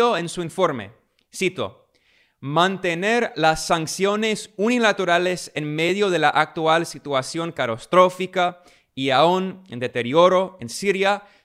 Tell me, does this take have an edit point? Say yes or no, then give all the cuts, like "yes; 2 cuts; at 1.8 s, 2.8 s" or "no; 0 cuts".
no; 0 cuts